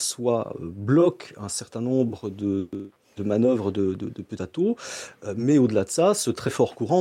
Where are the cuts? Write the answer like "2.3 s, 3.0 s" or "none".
none